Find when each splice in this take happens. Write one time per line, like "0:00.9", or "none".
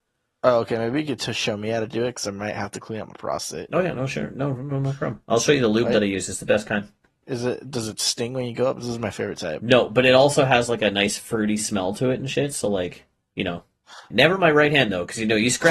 0:07.2
0:14.1